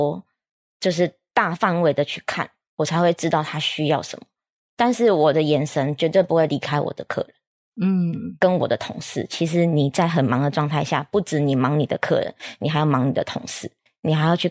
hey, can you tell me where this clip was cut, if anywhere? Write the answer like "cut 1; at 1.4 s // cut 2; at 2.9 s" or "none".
cut 1; at 2.6 s